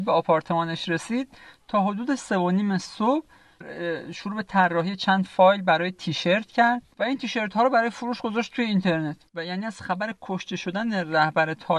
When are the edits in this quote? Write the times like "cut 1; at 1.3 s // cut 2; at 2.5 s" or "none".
cut 1; at 2.2 s // cut 2; at 6.9 s // cut 3; at 9.3 s